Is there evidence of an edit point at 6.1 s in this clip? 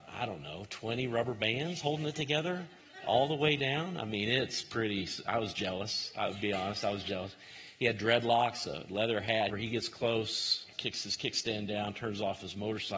no; 2 cuts; at 9.5 s, 10.7 s

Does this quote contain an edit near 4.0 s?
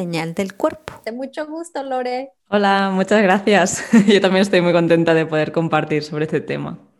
no; 2 cuts; at 1.1 s, 2.4 s

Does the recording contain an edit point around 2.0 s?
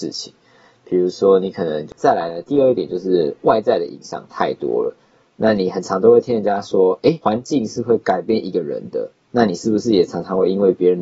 yes; 2 cuts; at 2.0 s, 9.2 s

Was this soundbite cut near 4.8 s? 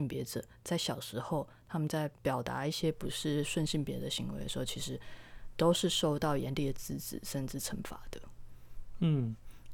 no; 1 cut; at 2.2 s

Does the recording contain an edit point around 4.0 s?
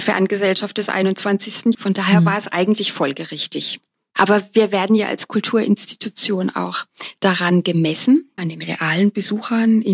no; 2 cuts; at 1.7 s, 8.4 s

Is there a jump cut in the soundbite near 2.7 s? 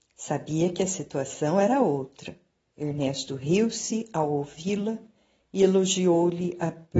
yes; 1 cut; at 2.7 s

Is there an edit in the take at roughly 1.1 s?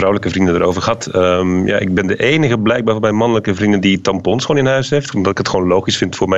no; 1 cut; at 5.1 s

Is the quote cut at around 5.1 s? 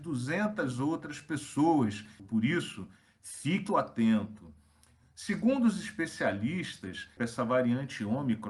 no; 3 cuts; at 2.2 s, 3.7 s, 7.2 s

